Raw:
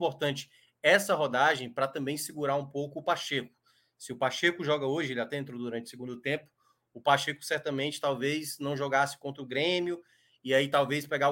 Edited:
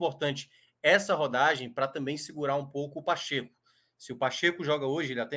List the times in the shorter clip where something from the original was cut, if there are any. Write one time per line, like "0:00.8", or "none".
none